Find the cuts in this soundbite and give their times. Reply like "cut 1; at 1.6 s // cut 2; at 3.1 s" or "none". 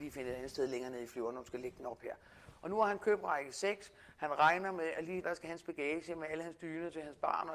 cut 1; at 5.2 s